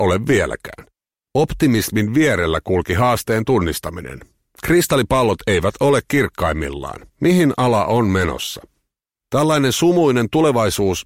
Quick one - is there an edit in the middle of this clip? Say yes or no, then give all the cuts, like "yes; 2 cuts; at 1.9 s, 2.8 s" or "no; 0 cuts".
yes; 1 cut; at 7.1 s